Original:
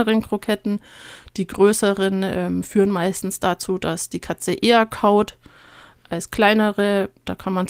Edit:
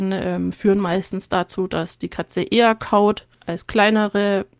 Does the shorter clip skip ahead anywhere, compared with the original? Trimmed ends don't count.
yes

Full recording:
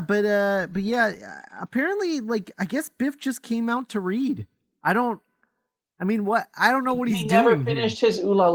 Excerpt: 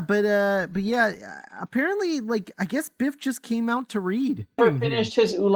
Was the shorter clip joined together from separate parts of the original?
yes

